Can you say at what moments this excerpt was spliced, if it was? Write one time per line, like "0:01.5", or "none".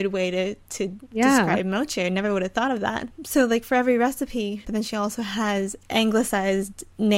0:04.6
0:05.8